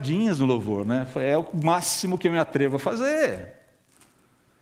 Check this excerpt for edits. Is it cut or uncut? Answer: uncut